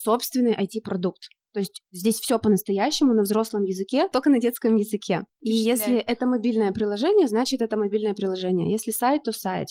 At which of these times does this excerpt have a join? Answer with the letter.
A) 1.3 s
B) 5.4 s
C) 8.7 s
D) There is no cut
D